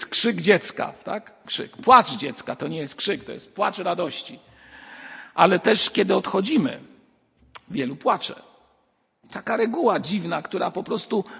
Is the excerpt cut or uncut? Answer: uncut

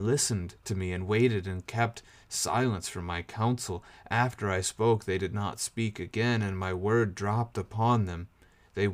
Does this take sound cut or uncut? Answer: uncut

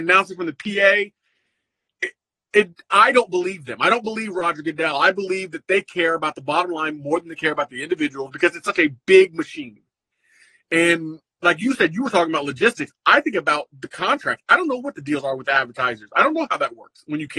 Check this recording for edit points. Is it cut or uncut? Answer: uncut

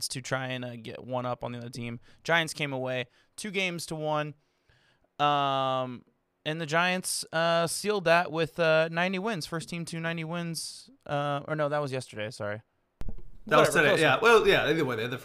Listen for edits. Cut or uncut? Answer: uncut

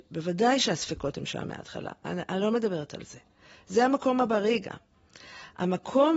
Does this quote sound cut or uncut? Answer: uncut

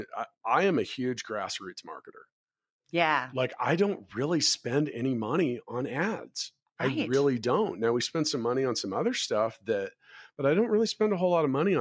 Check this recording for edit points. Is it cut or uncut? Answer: uncut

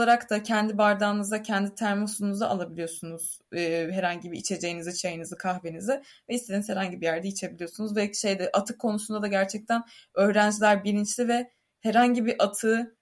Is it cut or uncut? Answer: uncut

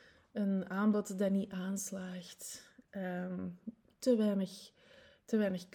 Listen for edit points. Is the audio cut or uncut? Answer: uncut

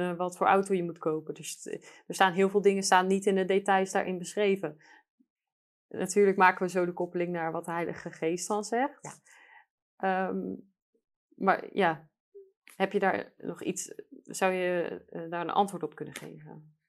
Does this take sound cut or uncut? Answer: uncut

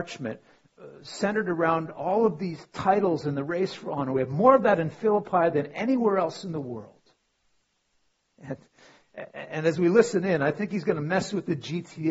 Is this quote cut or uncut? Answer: cut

